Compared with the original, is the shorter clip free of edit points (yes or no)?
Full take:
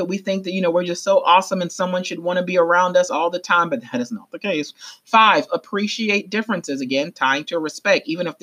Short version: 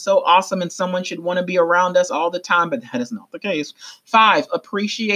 yes